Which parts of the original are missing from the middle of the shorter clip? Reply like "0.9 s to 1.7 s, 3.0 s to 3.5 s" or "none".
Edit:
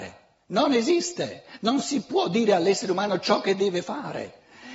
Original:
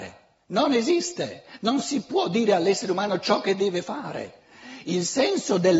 none